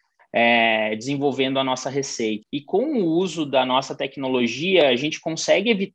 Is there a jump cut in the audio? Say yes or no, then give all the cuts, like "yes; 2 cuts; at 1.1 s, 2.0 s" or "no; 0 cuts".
yes; 1 cut; at 2.4 s